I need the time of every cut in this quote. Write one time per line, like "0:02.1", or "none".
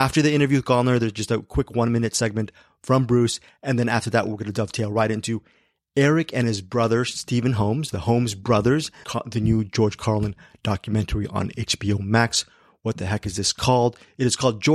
0:09.0

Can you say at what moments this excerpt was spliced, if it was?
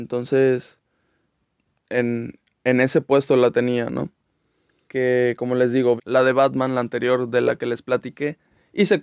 0:04.9
0:06.0

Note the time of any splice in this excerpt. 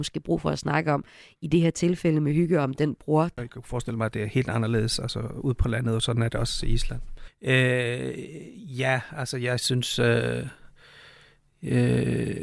0:03.4
0:07.3

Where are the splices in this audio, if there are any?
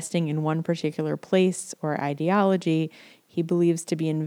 none

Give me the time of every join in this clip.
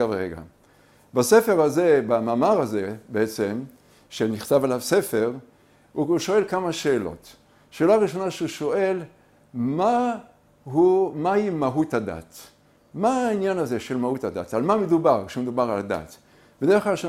none

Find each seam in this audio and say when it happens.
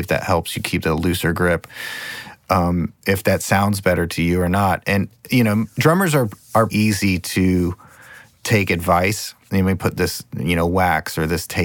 0:06.7
0:09.5

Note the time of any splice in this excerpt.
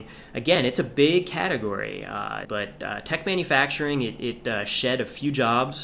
0:02.4

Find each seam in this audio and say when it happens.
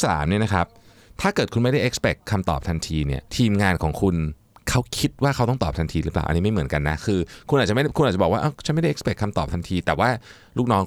0:03.3

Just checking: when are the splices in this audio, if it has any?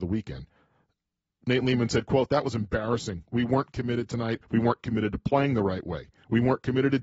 0:04.4

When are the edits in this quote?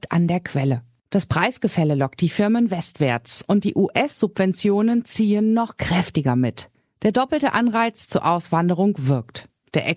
none

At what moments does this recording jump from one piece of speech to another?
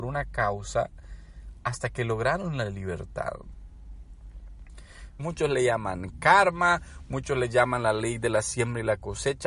0:05.2

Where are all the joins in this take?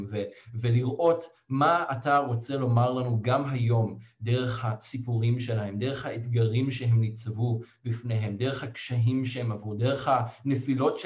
none

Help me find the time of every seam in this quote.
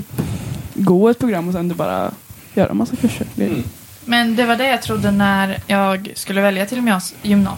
none

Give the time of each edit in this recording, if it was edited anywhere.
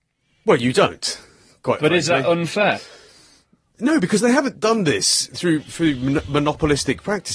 none

